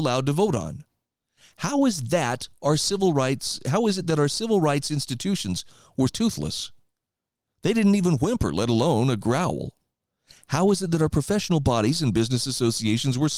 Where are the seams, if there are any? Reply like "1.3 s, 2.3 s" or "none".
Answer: 6.1 s